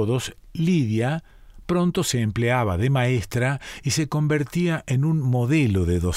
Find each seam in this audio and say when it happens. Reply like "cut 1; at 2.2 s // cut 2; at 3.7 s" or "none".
none